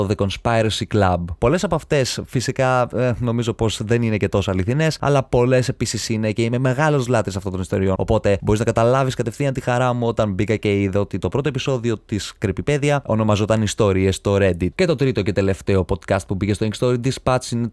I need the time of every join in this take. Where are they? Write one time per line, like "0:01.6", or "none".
0:01.4
0:08.0
0:14.7